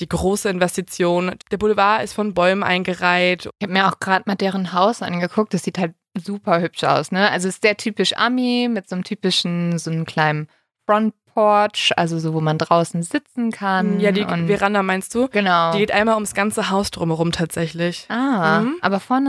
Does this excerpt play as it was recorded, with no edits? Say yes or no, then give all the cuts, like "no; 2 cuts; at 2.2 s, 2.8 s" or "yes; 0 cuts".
no; 1 cut; at 1.4 s